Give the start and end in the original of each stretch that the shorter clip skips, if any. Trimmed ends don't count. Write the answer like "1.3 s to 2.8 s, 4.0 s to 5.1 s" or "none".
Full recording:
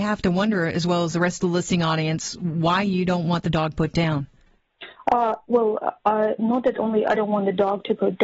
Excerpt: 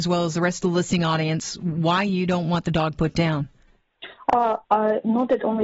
5.4 s to 6.0 s